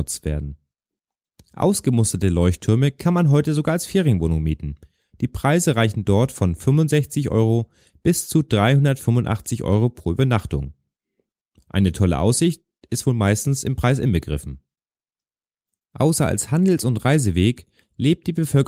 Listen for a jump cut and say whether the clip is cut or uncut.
uncut